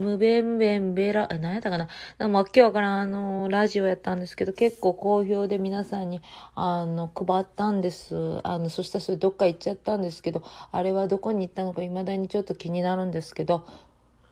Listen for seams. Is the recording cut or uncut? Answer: uncut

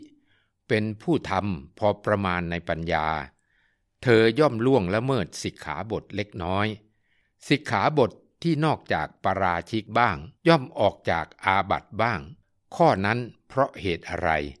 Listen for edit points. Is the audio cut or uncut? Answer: cut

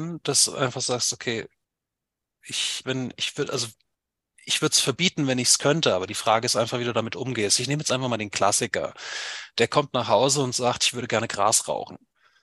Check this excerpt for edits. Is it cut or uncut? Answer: cut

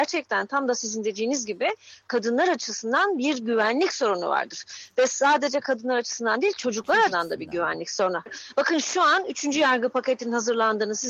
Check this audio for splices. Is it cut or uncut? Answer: cut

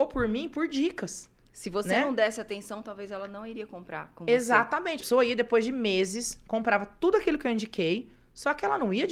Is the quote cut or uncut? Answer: cut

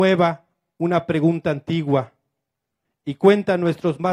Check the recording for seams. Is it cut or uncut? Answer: cut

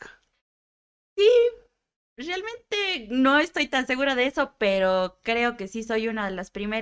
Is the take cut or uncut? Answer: uncut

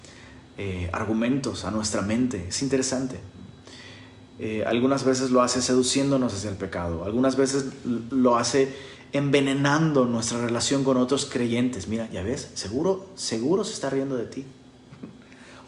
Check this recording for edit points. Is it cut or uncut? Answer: uncut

